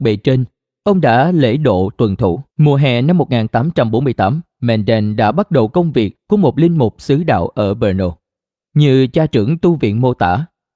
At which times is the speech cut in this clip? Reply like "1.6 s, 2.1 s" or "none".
2.5 s, 8.6 s